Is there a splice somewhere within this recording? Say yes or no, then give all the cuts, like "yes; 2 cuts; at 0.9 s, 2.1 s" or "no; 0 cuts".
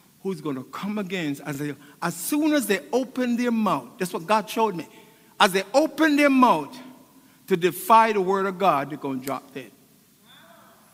no; 0 cuts